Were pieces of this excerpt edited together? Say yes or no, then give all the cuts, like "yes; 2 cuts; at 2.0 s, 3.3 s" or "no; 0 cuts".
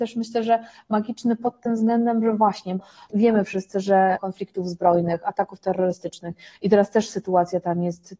yes; 1 cut; at 4.2 s